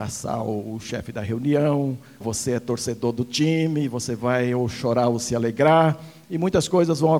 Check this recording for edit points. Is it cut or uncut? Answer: cut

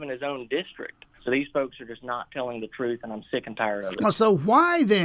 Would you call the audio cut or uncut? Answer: cut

